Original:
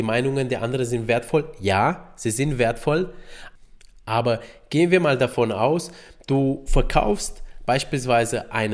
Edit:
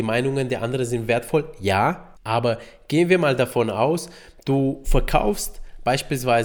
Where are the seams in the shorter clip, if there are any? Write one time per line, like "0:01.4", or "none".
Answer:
0:02.2